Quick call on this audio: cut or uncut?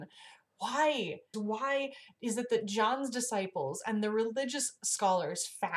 cut